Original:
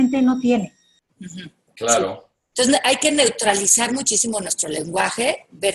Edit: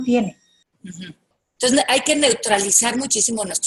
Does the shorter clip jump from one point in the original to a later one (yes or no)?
yes